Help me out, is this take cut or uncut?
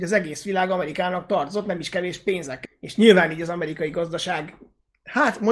cut